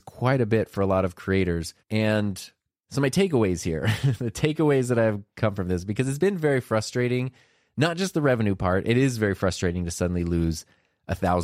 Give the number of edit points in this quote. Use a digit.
1